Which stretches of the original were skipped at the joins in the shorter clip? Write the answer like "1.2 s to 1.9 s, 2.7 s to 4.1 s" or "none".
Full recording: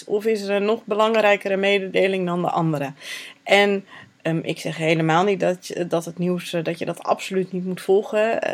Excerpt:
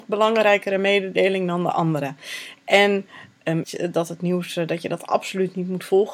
4.4 s to 5.6 s